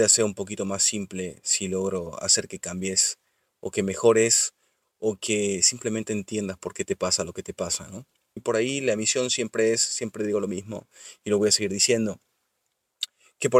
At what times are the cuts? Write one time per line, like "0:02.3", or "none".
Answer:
0:08.4

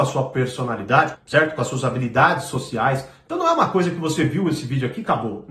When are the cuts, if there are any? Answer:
0:01.1

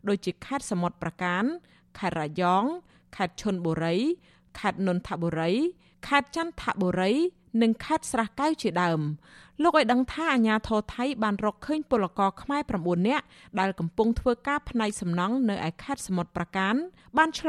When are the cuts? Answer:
none

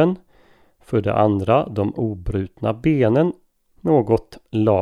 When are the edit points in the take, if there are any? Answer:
0:03.7

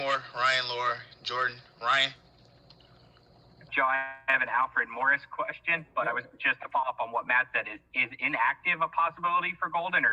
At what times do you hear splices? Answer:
0:03.7

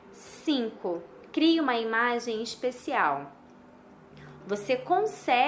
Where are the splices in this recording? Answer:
0:01.3
0:04.4

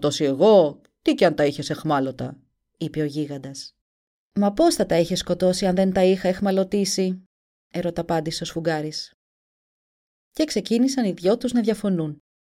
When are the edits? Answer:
none

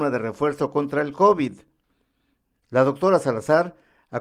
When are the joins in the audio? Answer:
0:02.5

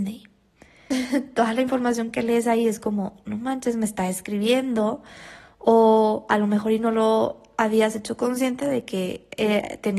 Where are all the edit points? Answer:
0:00.9

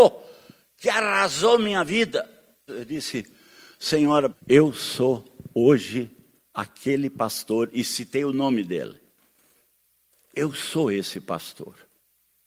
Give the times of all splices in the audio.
0:02.7
0:04.3

